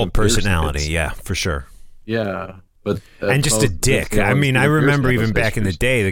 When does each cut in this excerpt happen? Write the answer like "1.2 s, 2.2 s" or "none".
none